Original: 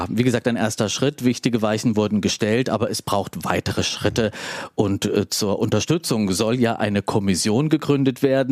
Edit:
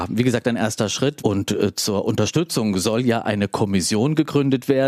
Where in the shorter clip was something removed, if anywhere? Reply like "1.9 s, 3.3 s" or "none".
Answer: 1.2 s